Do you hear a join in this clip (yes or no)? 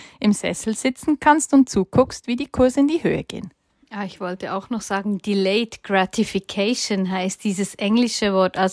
no